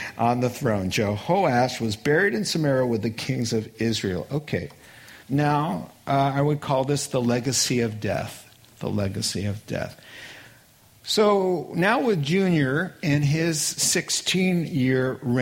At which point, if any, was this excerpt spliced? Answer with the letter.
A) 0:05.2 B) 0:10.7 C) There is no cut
A